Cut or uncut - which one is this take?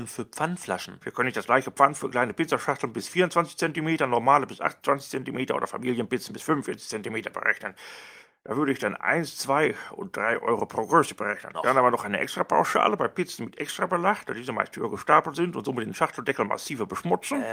cut